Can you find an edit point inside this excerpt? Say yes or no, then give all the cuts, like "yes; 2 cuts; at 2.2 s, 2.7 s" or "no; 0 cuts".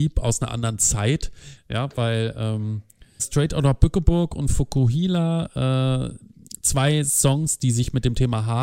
yes; 2 cuts; at 1.6 s, 3.2 s